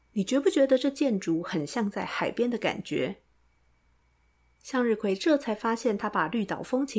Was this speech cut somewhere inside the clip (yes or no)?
no